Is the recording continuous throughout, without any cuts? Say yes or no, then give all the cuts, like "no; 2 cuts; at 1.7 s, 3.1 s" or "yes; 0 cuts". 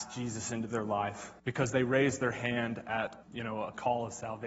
no; 2 cuts; at 1.4 s, 3.2 s